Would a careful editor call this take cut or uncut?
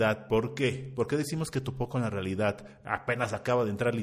uncut